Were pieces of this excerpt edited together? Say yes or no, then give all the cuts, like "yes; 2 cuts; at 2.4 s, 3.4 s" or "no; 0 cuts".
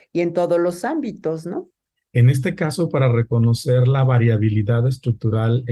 yes; 1 cut; at 2.0 s